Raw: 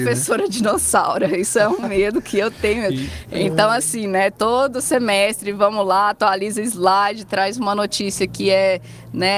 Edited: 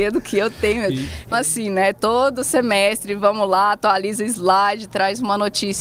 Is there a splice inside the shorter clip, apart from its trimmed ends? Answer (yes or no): yes